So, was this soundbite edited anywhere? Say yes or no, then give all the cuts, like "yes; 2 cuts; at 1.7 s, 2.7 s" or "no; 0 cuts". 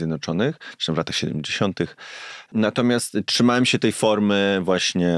yes; 1 cut; at 2.5 s